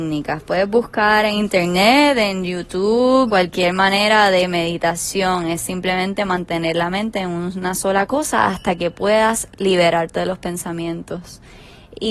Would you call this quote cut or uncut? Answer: cut